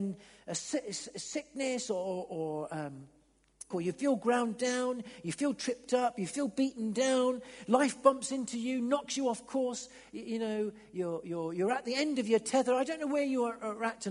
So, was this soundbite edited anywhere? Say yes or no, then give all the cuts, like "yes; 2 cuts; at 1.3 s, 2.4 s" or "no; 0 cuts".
yes; 1 cut; at 3.7 s